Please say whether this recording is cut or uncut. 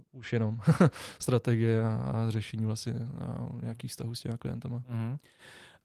uncut